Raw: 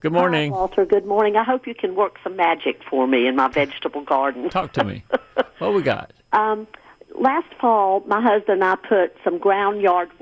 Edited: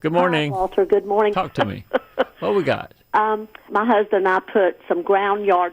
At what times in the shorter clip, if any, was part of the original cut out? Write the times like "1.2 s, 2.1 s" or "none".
1.3 s, 3.7 s